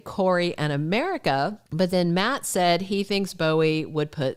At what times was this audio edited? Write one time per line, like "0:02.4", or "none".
0:01.7

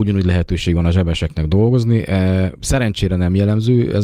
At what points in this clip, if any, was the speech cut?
none

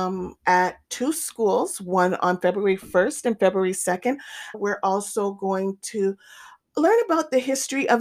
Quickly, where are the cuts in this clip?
0:04.5

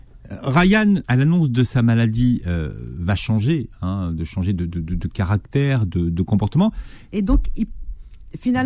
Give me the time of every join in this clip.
0:01.0
0:07.1

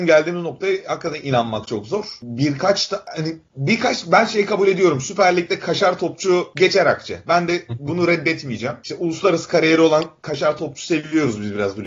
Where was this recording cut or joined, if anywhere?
none

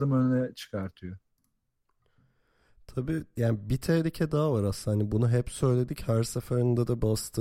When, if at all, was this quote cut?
none

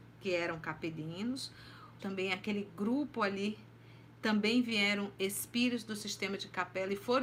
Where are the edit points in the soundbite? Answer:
0:02.0

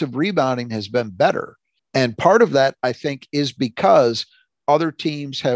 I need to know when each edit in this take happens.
0:01.8

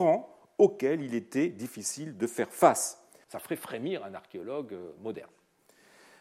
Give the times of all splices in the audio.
0:03.2

